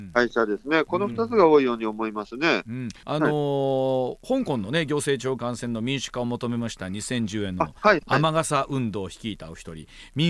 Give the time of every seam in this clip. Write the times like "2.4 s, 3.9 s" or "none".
none